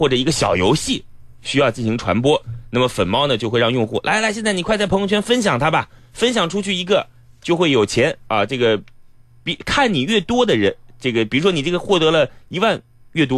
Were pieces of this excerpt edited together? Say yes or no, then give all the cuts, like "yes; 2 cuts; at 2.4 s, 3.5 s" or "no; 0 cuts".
no; 0 cuts